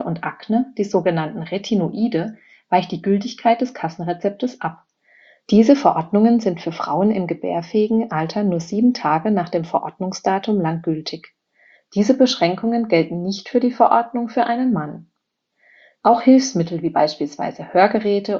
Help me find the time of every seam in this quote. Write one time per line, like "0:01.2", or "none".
0:11.8